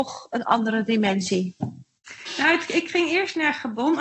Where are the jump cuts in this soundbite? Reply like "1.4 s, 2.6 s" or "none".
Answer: none